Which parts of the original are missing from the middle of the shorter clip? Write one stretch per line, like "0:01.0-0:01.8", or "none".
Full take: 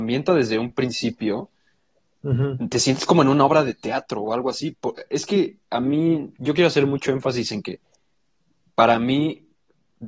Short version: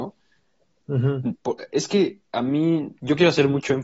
0:02.7-0:04.7